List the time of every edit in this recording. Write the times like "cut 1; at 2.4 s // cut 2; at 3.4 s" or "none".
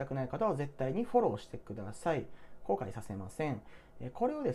none